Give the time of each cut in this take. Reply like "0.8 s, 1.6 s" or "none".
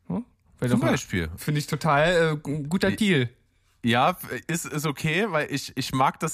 1.4 s